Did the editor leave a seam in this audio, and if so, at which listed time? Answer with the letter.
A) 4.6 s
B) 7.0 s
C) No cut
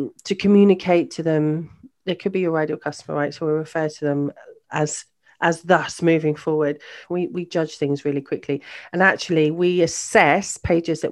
B